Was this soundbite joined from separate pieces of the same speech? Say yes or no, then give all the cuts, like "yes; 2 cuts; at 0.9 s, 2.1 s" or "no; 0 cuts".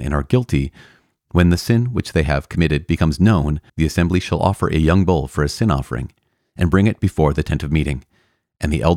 yes; 1 cut; at 3.7 s